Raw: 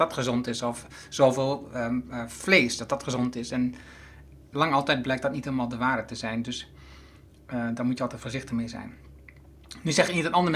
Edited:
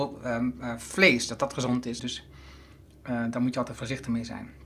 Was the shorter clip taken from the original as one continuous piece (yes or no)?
no